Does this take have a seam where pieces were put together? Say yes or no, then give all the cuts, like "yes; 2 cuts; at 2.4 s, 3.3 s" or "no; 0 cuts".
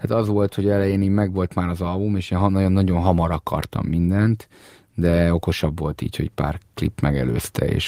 no; 0 cuts